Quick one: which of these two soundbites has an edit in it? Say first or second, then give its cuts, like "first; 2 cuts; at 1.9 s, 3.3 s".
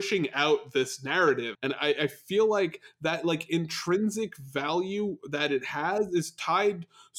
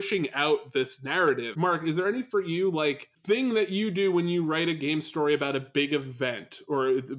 first; 1 cut; at 1.5 s